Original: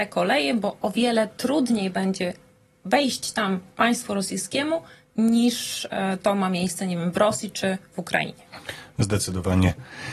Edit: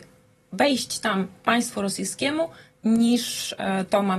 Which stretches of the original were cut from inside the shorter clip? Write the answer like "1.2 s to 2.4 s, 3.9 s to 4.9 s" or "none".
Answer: none